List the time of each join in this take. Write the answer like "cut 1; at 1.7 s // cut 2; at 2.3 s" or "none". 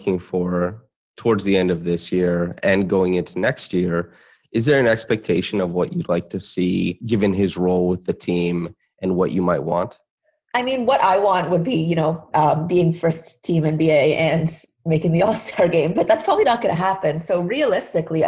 cut 1; at 12.3 s